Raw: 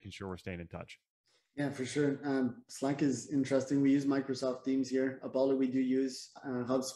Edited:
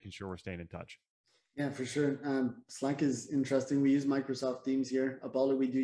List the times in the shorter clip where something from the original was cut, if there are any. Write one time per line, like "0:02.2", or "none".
none